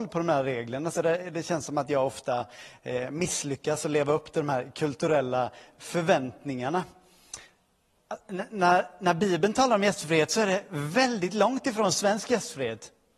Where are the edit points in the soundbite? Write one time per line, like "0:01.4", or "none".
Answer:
none